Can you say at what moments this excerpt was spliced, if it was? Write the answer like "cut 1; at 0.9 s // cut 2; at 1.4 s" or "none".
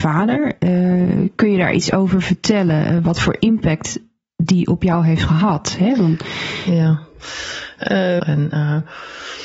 cut 1; at 8.2 s